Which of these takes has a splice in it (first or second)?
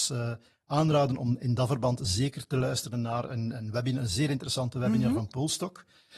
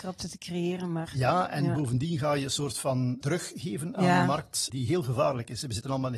second